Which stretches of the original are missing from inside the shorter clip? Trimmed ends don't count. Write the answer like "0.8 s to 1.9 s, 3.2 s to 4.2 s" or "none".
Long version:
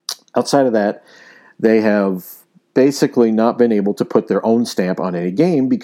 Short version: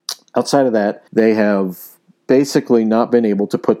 1.1 s to 1.5 s